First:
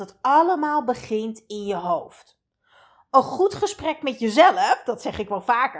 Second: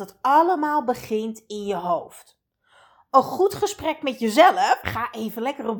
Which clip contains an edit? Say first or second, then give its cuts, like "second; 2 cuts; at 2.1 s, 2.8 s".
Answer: second; 1 cut; at 4.8 s